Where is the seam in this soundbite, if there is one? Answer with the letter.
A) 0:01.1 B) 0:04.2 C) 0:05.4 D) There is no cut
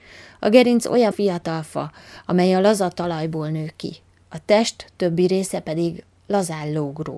A